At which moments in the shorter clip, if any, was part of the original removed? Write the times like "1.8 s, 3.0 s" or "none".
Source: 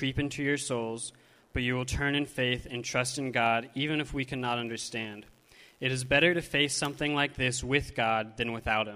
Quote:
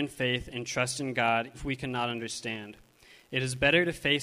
1.5 s